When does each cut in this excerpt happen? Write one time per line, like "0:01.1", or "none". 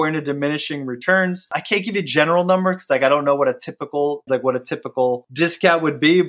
0:04.3